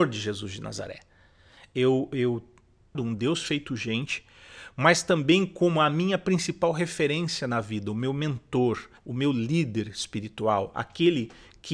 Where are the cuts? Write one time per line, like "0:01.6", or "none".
0:02.9
0:09.0